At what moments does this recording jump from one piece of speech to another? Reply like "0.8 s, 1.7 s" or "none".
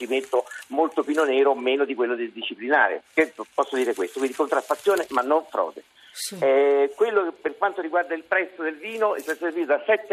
none